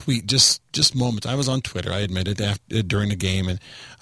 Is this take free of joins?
yes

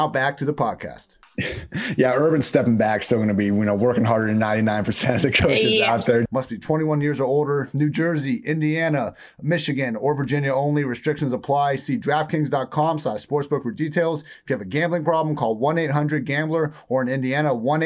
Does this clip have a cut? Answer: yes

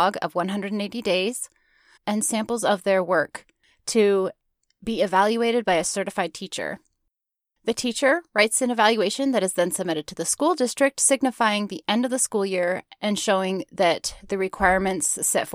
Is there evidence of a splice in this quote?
yes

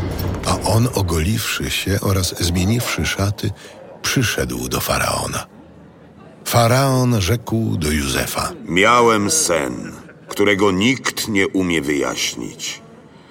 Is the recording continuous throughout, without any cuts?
yes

